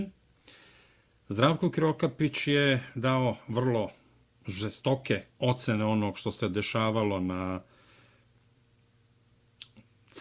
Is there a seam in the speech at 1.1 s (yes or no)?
no